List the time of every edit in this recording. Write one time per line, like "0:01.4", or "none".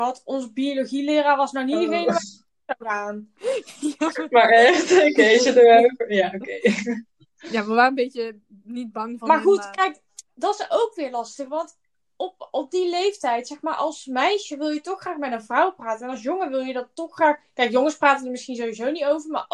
none